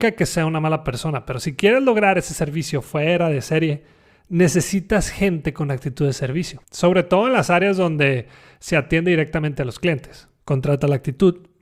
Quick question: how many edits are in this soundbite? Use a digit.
2